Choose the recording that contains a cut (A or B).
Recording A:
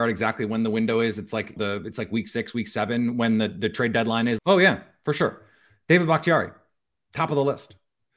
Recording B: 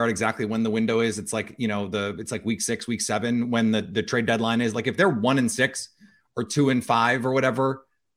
A